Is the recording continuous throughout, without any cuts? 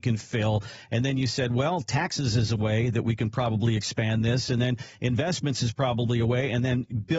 yes; 0 cuts

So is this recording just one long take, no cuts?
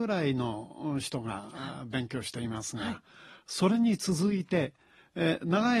yes; 0 cuts

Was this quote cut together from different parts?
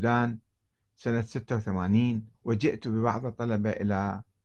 yes; 1 cut; at 2.3 s

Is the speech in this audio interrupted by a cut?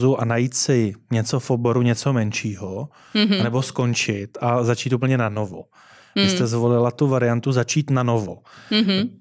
no; 0 cuts

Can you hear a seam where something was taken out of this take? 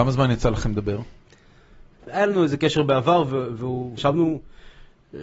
yes; 2 cuts; at 2.0 s, 4.0 s

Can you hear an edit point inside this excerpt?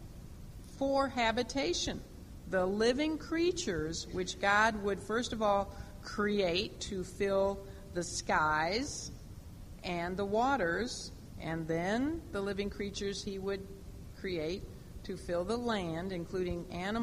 no; 0 cuts

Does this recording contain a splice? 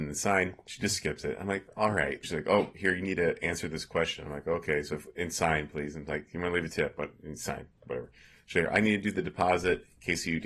yes; 1 cut; at 2.2 s

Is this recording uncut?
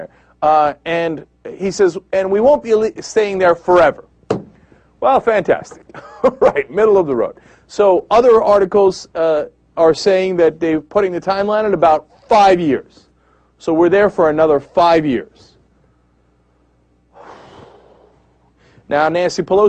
yes; 0 cuts

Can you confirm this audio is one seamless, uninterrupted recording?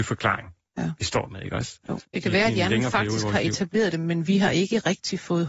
no; 1 cut; at 2.0 s

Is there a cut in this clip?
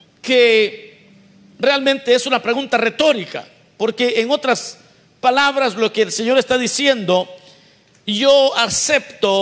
no; 0 cuts

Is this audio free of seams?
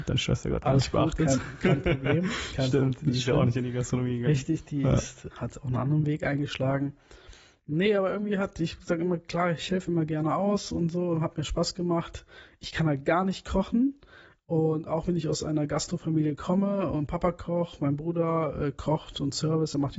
no; 1 cut; at 5.3 s

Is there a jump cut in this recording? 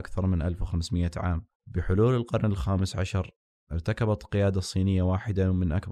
yes; 1 cut; at 1.5 s

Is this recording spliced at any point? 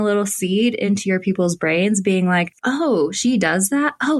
no; 0 cuts

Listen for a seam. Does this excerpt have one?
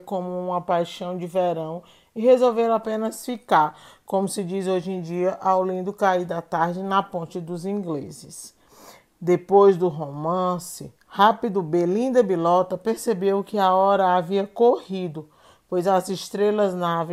yes; 1 cut; at 11.0 s

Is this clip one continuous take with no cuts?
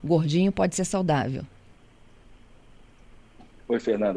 yes; 0 cuts

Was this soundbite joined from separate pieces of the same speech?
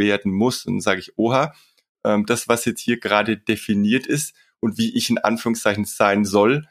no; 0 cuts

